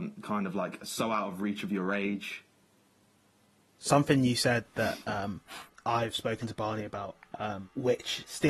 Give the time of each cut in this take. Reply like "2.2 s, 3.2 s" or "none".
3.7 s